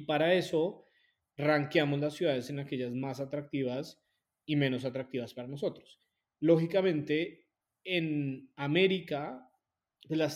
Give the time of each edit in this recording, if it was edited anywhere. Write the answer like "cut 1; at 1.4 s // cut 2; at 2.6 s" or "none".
none